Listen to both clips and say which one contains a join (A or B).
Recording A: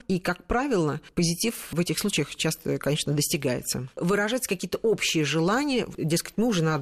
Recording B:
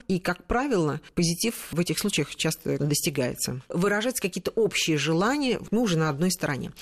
B